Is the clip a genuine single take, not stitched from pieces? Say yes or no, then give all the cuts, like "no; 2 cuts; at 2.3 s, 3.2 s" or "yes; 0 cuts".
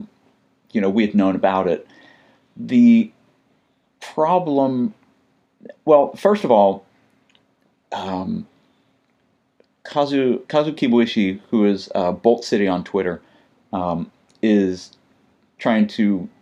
yes; 0 cuts